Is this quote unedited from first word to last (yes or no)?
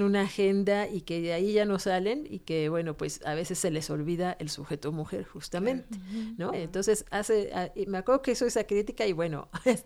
no